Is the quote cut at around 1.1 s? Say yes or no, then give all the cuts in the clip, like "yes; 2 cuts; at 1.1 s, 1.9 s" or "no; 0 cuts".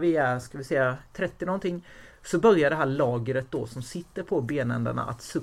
yes; 1 cut; at 1.1 s